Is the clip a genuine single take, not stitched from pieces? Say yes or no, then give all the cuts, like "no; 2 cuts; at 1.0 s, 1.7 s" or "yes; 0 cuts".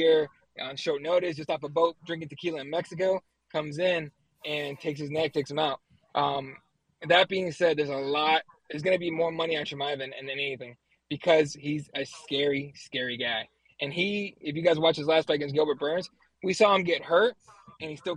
yes; 0 cuts